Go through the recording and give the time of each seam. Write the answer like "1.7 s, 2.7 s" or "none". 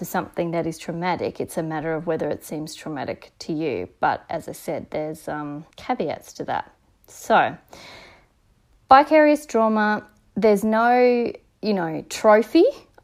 5.7 s